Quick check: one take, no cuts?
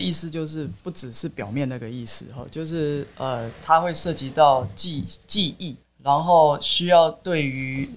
no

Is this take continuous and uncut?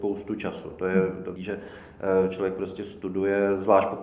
no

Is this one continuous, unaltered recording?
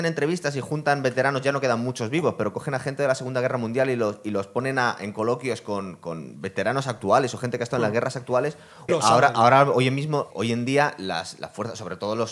no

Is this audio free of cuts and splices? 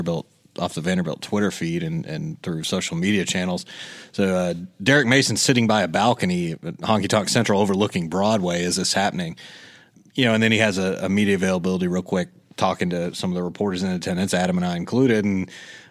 yes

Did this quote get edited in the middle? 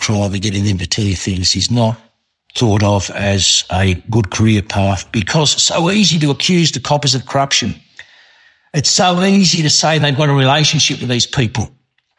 no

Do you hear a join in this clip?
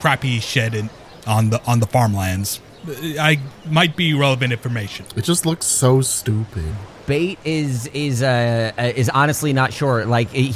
yes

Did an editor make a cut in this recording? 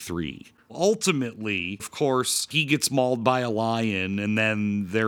yes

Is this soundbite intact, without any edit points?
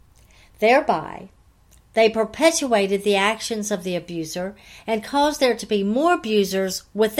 yes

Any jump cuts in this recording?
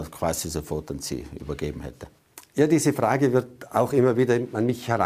no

